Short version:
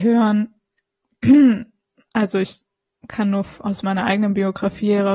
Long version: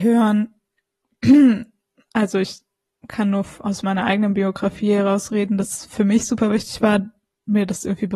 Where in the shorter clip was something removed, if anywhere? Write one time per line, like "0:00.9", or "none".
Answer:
none